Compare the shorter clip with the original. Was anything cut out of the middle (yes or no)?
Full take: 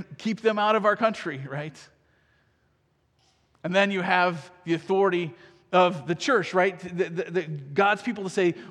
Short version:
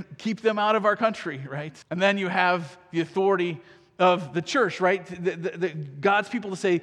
yes